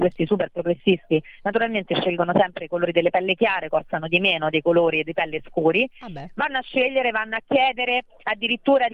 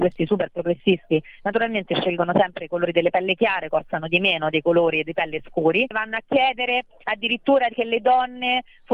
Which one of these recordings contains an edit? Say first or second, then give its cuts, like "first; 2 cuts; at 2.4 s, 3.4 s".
second; 1 cut; at 5.9 s